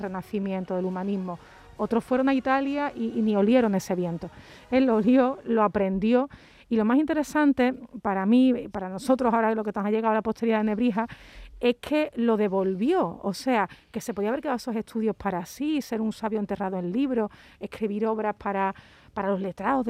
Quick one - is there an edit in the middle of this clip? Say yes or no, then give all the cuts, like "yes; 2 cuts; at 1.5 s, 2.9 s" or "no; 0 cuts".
no; 0 cuts